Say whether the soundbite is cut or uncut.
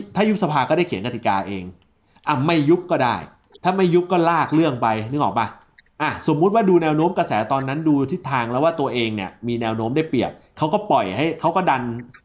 uncut